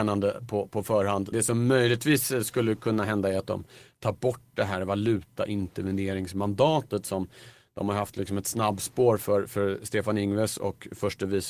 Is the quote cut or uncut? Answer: cut